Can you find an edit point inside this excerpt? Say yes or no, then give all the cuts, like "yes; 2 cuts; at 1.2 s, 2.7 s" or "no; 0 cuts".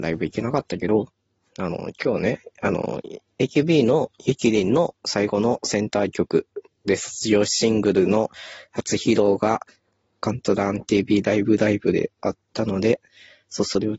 no; 0 cuts